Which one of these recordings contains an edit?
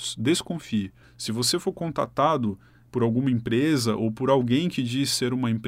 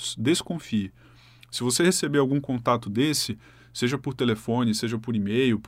first; 2 cuts; at 1.0 s, 2.9 s

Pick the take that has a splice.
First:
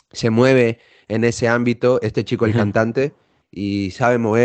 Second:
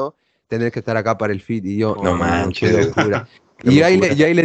second; 1 cut; at 2.0 s

